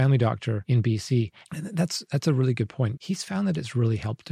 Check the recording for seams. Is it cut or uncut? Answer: cut